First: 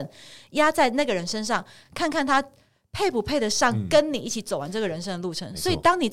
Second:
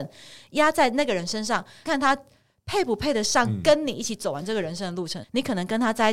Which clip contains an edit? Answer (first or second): second